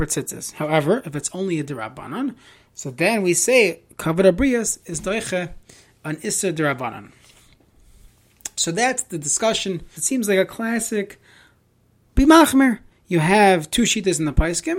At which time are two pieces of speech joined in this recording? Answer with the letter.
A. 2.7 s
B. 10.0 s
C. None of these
B